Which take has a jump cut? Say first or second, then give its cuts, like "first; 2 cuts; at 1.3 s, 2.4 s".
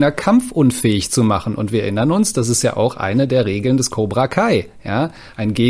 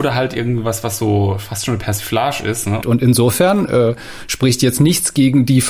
second; 1 cut; at 2.8 s